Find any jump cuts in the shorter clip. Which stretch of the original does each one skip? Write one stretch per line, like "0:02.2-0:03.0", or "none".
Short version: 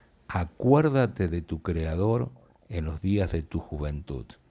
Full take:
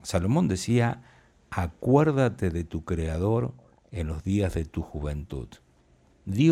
none